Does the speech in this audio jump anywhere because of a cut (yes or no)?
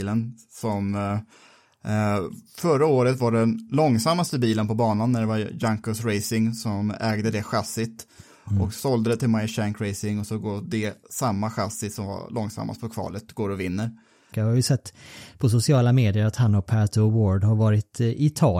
yes